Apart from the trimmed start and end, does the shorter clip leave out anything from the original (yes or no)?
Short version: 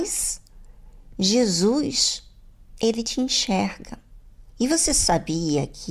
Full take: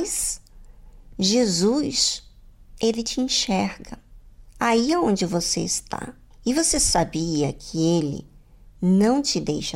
yes